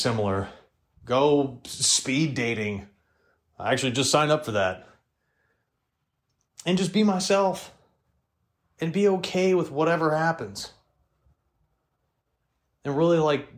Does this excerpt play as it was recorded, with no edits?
yes; 0 cuts

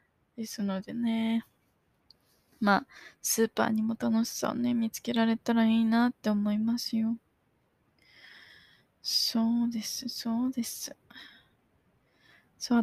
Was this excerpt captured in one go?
yes; 0 cuts

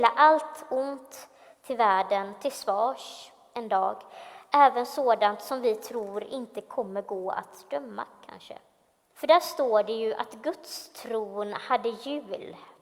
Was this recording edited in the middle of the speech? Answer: yes; 1 cut; at 9.1 s

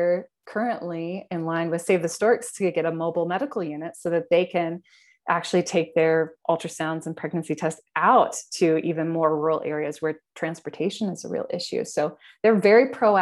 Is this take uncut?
yes; 0 cuts

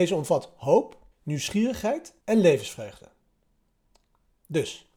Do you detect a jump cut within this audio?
yes; 2 cuts; at 1.1 s, 2.2 s

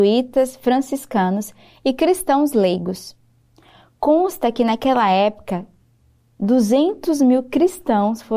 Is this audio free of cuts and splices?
yes; 0 cuts

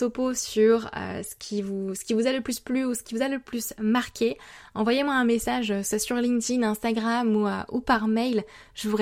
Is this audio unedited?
yes; 0 cuts

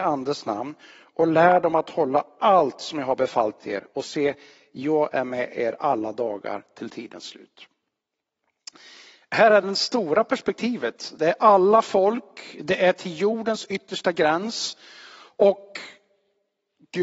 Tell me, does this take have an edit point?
yes; 1 cut; at 9.6 s

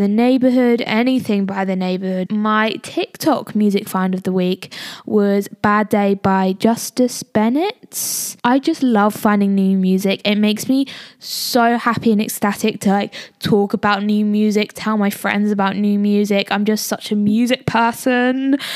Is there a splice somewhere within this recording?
yes; 1 cut; at 2.3 s

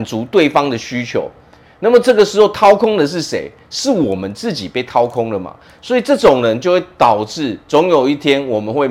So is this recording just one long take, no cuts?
yes; 0 cuts

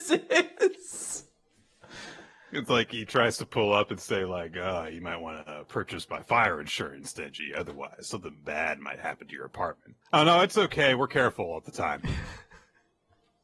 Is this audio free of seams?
no; 1 cut; at 10.0 s

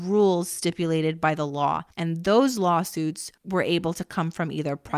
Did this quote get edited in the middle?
yes; 2 cuts; at 1.9 s, 3.4 s

